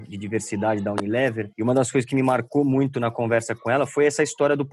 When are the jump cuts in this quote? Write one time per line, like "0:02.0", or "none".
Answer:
0:01.5